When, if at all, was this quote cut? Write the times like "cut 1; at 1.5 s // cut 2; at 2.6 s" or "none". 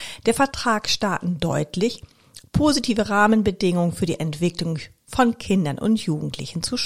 none